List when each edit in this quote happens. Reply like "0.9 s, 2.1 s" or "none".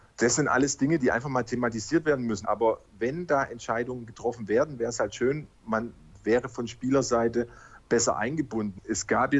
2.4 s